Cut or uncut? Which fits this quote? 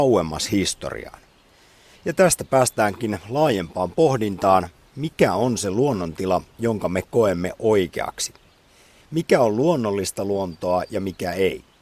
uncut